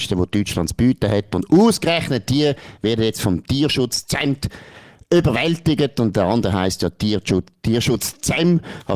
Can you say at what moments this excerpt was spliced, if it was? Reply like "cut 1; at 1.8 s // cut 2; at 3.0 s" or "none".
none